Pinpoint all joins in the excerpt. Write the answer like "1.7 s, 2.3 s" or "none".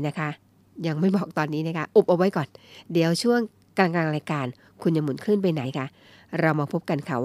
5.6 s

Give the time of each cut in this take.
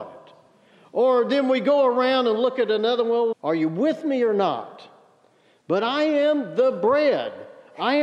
3.3 s

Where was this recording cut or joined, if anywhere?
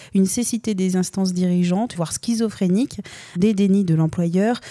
2.0 s

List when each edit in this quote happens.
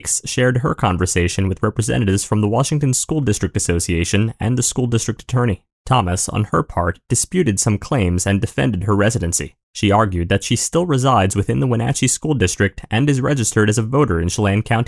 5.7 s, 9.6 s

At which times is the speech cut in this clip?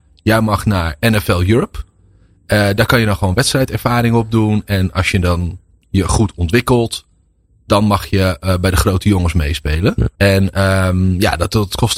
10.1 s

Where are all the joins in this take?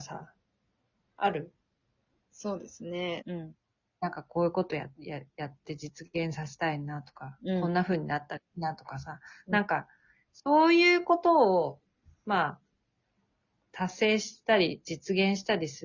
3.2 s

